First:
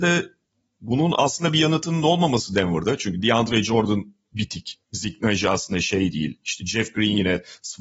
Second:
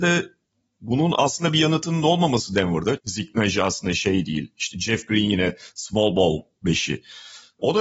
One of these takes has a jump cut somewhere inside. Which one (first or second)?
second